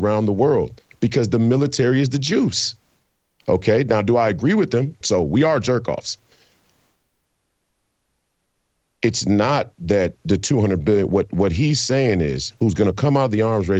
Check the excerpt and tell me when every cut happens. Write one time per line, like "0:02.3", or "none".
0:05.0